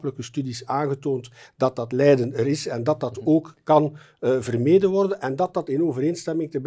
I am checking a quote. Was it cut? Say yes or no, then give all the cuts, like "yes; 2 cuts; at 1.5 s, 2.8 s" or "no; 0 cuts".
no; 0 cuts